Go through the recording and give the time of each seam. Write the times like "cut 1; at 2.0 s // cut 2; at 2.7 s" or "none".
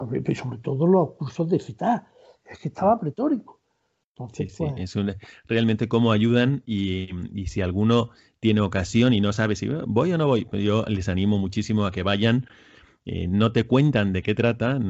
none